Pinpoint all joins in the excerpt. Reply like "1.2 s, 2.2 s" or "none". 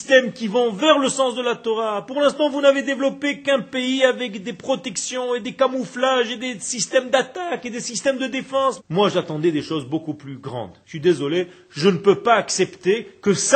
8.8 s, 10.8 s